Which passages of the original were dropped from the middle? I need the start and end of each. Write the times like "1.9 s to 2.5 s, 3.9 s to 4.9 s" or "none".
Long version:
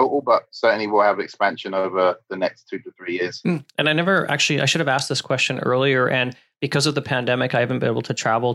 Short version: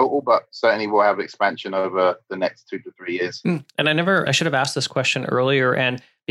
4.3 s to 4.6 s

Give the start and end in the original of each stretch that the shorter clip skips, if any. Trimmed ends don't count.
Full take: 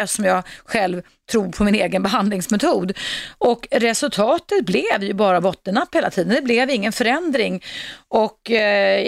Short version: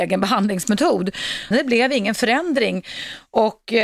3.3 s to 6.3 s

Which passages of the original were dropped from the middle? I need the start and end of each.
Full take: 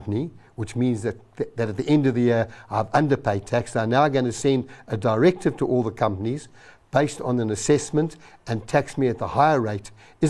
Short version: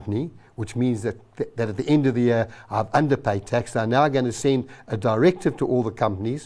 none

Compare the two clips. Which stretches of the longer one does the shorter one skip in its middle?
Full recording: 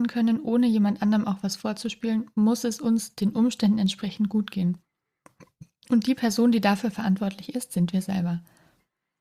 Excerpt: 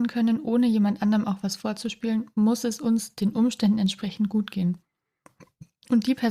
none

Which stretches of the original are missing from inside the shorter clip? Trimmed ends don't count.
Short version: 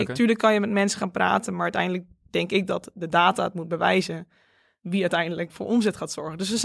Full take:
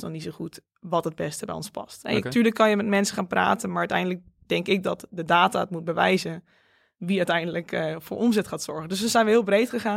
7.7 s to 8.0 s

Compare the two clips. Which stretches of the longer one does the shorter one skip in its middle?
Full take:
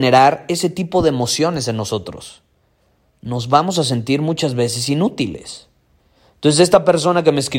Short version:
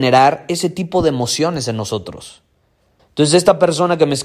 3.0 s to 6.3 s

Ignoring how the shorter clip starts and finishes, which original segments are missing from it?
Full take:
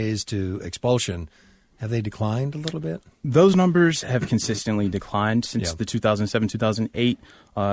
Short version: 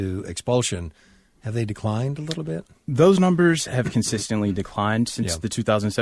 none

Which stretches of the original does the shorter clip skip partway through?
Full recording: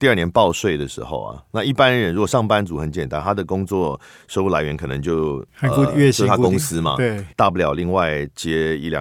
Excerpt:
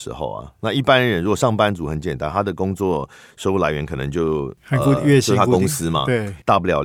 none

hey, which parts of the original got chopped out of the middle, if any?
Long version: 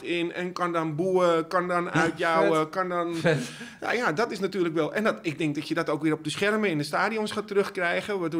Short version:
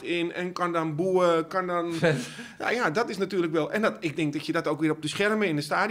1.5 s to 2.7 s

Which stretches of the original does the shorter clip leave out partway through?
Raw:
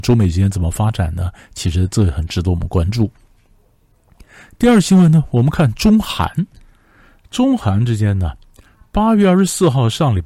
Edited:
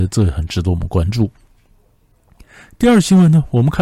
none

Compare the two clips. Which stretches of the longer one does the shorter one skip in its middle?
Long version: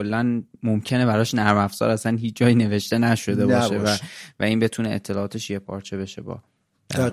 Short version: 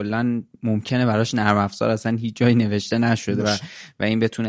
3.4 s to 3.8 s

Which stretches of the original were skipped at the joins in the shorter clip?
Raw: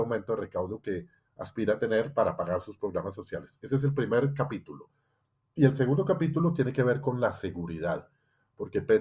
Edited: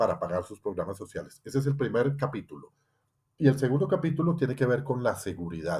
none

